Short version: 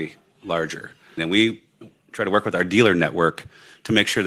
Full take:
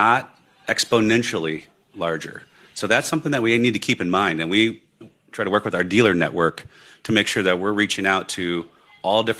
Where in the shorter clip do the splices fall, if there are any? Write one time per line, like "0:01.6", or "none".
0:01.2